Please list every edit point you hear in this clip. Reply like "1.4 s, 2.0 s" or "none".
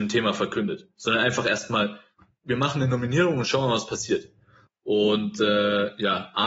4.7 s